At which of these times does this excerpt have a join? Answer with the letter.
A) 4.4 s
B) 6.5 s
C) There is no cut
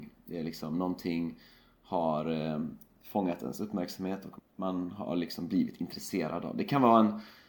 A